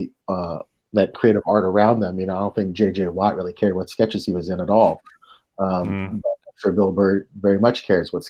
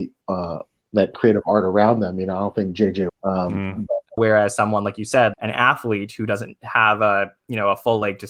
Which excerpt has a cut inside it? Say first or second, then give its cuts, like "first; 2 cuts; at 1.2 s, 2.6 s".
second; 3 cuts; at 3.1 s, 4.2 s, 5.3 s